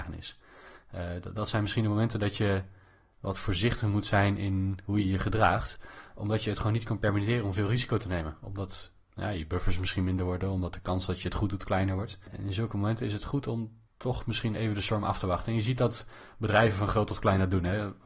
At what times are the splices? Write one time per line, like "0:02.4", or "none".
none